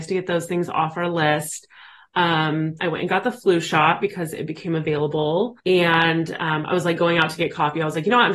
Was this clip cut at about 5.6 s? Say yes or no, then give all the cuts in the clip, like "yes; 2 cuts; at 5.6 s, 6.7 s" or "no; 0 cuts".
yes; 2 cuts; at 2.8 s, 5.6 s